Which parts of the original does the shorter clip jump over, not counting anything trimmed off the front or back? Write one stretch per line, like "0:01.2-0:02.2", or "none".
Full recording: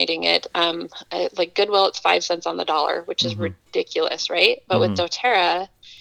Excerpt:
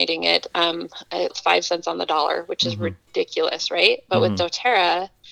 0:01.3-0:01.9